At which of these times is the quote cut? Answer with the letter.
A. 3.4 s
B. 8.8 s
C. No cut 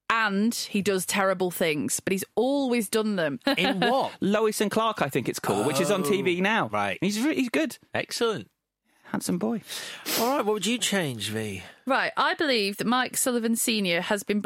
A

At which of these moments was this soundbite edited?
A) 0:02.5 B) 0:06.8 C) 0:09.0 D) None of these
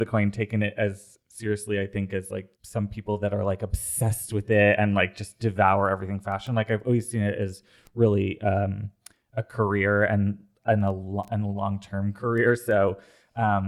A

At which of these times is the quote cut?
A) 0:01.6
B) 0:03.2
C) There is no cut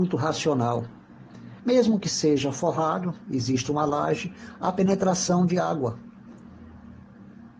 A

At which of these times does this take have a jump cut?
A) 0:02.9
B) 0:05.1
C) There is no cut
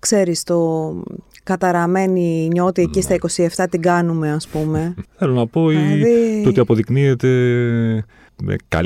B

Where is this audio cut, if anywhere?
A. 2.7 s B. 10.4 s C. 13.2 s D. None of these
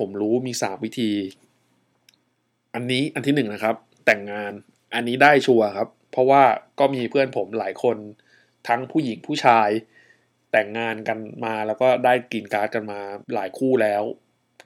C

